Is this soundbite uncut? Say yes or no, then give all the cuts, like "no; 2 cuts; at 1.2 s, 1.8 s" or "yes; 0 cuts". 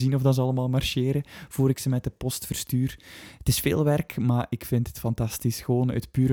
yes; 0 cuts